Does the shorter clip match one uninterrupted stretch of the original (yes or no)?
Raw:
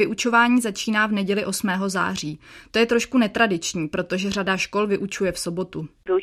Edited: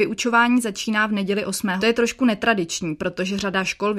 no